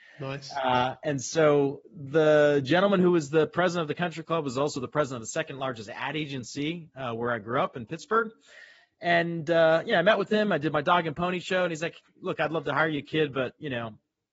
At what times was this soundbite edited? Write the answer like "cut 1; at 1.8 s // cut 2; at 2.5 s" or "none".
none